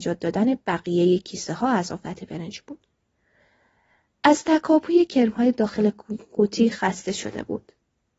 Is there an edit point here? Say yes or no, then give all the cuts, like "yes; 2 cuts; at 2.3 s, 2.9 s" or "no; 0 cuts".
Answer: no; 0 cuts